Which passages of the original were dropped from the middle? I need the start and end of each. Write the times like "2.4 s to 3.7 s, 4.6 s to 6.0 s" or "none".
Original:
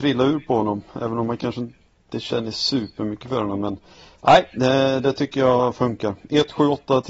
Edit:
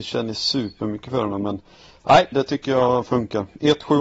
4.5 s to 5.0 s